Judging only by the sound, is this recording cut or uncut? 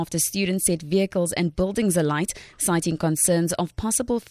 uncut